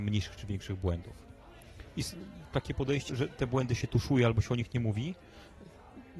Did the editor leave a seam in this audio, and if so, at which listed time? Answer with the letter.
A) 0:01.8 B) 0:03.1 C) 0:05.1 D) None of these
B